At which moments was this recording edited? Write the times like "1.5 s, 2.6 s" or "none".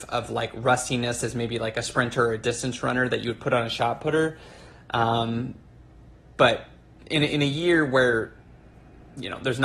none